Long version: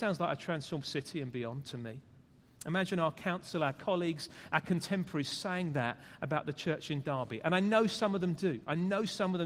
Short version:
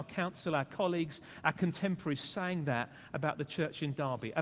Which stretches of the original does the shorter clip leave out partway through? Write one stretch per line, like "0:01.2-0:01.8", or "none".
none